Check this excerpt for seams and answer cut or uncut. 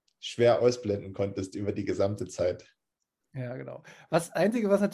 uncut